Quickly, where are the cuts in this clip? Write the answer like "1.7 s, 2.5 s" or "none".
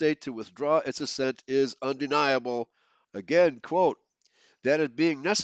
3.0 s